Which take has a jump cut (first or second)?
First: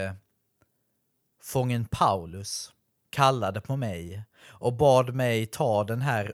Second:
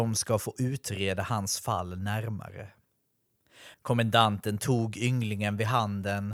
second